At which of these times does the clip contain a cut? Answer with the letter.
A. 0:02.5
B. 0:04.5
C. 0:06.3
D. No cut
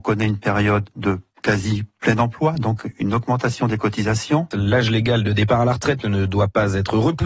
B